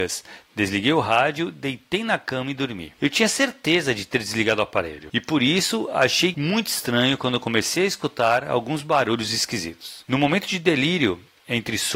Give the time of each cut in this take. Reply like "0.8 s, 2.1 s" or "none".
none